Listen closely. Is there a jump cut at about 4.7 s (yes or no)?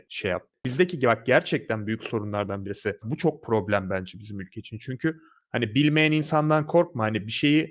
no